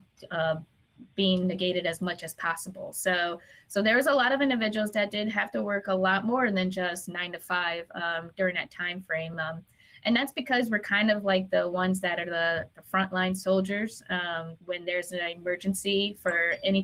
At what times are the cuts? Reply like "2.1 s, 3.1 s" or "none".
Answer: none